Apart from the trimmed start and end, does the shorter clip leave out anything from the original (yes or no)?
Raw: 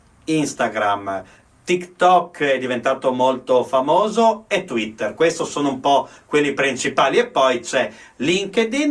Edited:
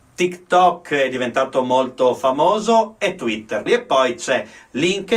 yes